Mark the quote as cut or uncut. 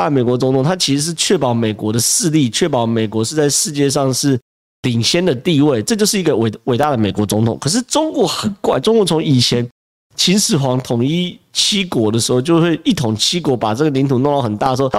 uncut